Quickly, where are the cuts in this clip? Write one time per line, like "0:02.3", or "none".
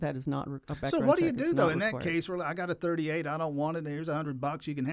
none